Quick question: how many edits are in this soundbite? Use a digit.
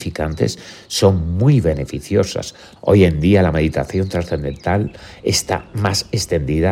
1